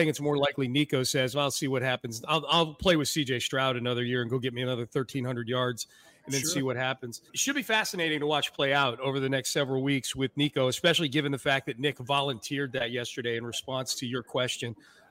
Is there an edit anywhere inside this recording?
yes; 1 cut; at 7.3 s

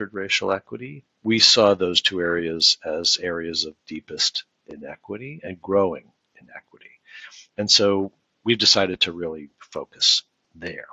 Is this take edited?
no; 0 cuts

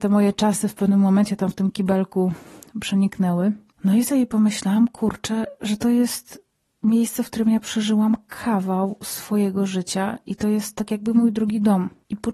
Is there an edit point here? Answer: no; 0 cuts

